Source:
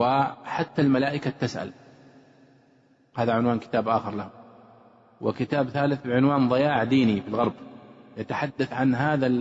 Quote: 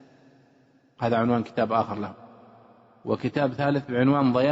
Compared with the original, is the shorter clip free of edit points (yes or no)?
yes